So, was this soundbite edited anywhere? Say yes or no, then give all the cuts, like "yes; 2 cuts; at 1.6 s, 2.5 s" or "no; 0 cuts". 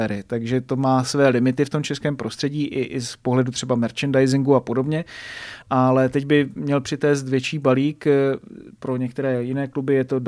yes; 1 cut; at 5.6 s